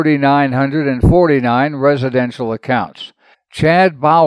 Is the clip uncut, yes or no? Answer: no